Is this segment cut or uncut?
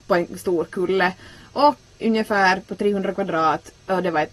cut